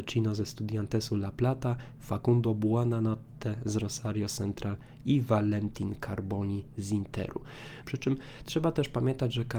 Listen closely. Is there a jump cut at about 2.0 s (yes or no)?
yes